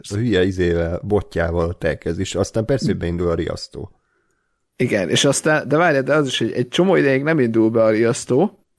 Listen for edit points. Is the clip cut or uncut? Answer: uncut